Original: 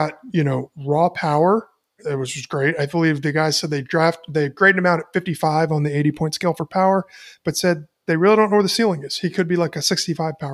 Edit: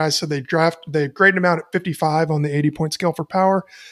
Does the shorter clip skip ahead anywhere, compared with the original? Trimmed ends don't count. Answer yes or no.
no